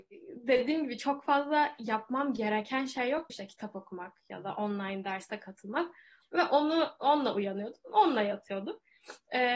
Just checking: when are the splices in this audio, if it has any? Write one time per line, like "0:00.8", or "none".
0:03.3
0:06.2